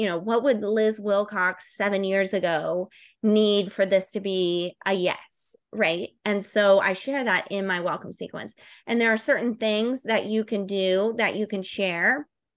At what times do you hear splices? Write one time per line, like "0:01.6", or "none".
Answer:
none

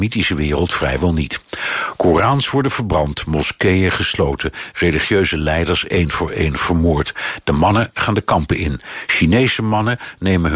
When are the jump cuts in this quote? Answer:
0:04.7

